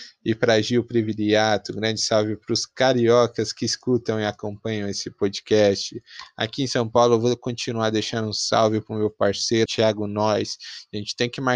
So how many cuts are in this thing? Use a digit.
1